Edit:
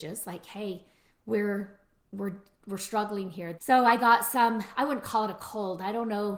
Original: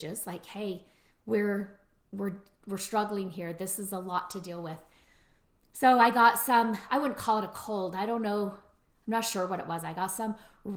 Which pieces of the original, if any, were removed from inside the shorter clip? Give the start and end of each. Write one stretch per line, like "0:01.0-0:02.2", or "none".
0:03.6-0:05.7